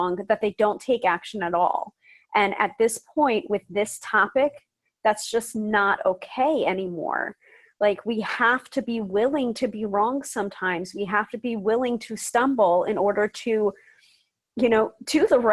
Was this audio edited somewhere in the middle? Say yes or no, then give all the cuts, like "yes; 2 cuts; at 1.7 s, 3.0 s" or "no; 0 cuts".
no; 0 cuts